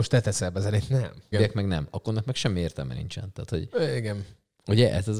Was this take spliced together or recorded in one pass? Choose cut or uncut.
cut